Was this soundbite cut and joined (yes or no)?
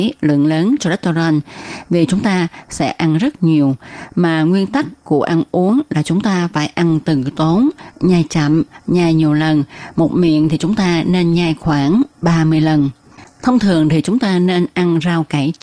yes